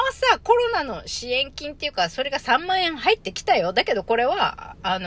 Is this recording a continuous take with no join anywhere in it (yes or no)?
yes